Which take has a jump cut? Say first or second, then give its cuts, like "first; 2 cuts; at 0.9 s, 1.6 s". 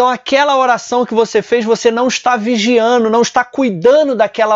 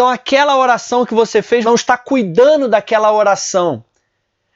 second; 1 cut; at 1.6 s